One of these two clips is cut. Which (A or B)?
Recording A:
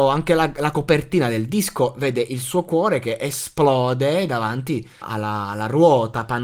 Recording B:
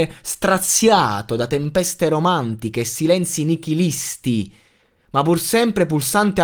A